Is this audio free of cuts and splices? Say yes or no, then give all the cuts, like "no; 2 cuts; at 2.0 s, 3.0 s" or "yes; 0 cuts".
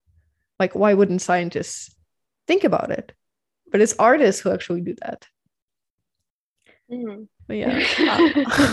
no; 1 cut; at 7.4 s